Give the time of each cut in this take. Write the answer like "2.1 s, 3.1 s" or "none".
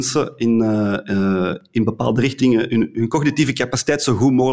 none